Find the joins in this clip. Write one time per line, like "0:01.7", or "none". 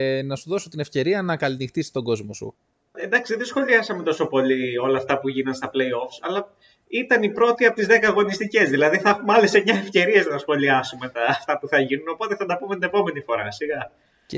0:02.9